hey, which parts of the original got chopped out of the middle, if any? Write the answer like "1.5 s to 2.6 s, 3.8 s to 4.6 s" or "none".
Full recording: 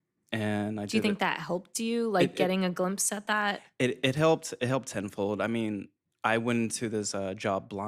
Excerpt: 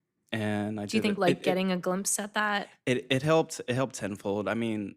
1.2 s to 2.1 s